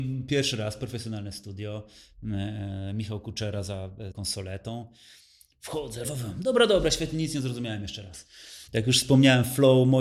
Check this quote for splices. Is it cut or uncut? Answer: cut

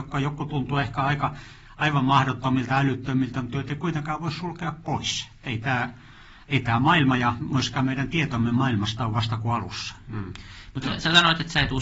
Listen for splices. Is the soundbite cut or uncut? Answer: uncut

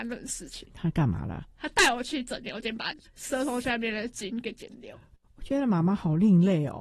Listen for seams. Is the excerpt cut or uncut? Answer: uncut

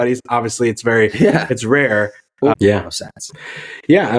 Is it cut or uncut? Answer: cut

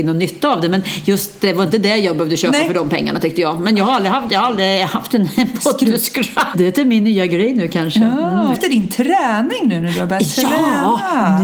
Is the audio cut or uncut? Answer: cut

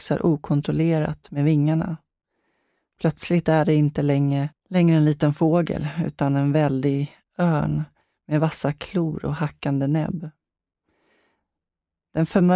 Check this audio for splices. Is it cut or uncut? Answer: uncut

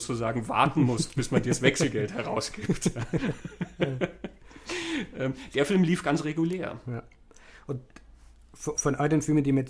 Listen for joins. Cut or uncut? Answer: uncut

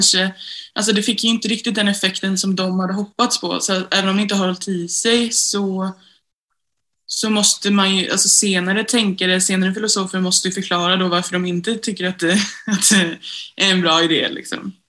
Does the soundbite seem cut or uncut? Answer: uncut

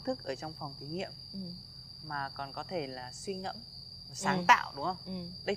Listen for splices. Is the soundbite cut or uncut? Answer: uncut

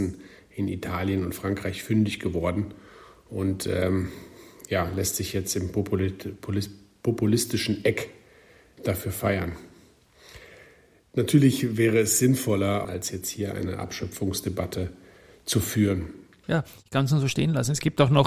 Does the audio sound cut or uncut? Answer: cut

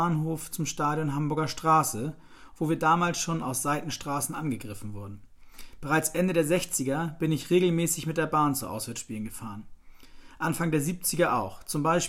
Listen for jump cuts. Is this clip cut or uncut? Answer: cut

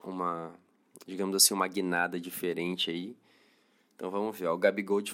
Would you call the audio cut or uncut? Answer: uncut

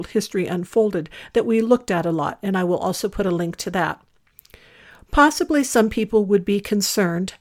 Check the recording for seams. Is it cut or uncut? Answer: uncut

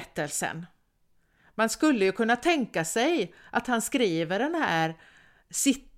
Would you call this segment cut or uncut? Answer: uncut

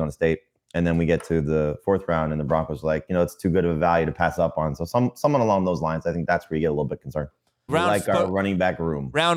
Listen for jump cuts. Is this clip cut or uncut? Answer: cut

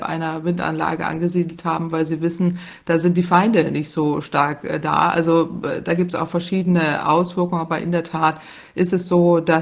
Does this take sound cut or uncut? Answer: uncut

